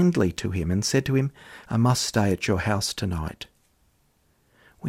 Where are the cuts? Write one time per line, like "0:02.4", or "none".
0:01.6